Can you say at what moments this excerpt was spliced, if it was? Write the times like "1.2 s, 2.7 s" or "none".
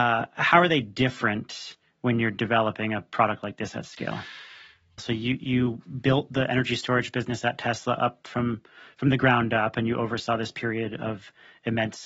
5.0 s